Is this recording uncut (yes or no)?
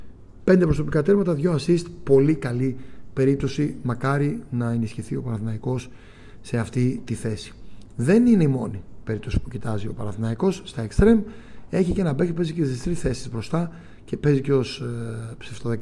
yes